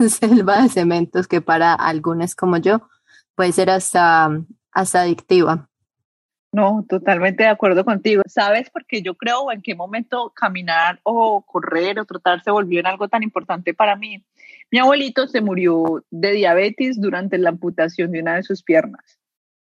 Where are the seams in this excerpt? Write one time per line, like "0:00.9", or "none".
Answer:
0:08.2